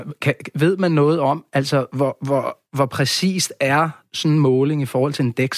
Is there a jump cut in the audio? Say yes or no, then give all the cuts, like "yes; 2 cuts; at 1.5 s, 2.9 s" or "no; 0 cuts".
no; 0 cuts